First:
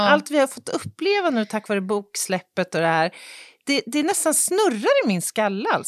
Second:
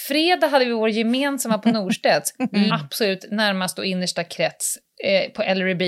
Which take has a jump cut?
second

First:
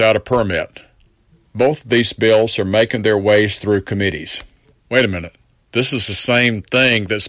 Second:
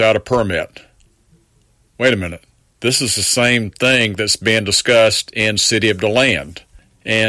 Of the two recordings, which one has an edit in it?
first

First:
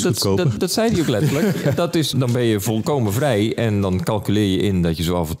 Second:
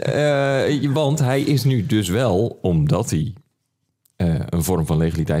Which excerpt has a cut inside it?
first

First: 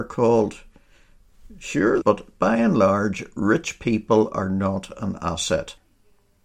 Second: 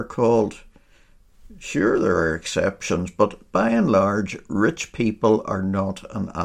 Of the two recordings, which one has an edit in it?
first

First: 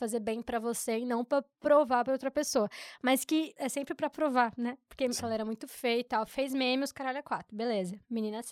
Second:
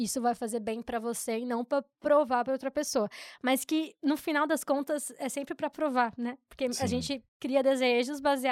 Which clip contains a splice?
first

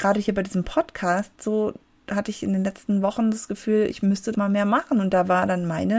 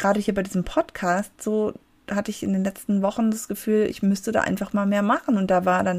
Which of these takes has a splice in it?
first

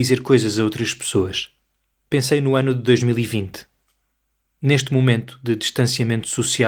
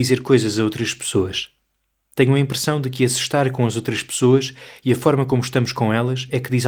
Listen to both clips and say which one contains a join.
first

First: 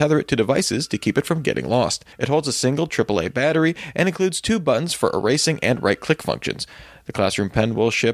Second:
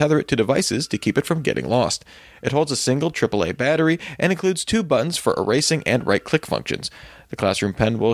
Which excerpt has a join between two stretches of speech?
first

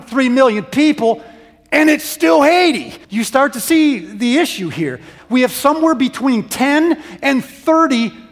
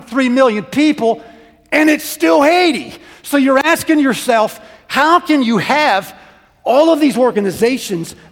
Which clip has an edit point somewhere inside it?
first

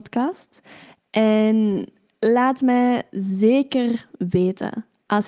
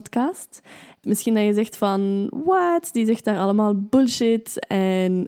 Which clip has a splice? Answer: second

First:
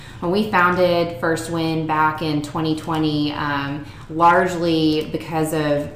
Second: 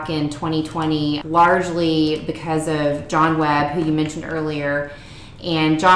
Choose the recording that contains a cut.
second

